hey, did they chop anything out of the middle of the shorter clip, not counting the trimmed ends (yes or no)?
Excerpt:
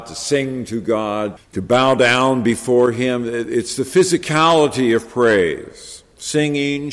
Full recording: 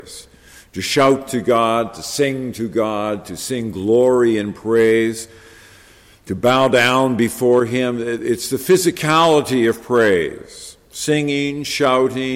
yes